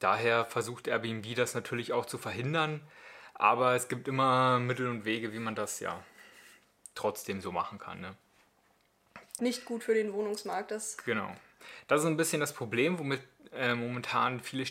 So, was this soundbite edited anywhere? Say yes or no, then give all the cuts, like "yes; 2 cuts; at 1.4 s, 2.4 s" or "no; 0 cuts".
yes; 1 cut; at 9.4 s